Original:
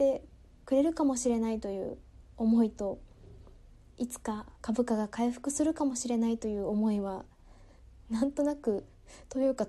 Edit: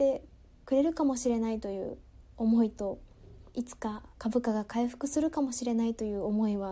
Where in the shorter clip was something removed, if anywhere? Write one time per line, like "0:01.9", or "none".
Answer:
0:03.5